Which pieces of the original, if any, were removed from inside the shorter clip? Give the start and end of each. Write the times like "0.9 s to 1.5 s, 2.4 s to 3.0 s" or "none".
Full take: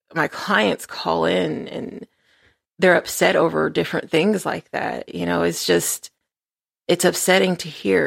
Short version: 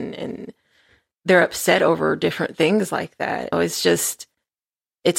5.1 s to 5.4 s